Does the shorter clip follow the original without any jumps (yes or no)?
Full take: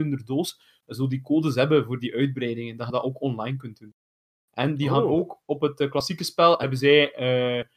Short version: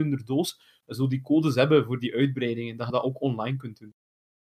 yes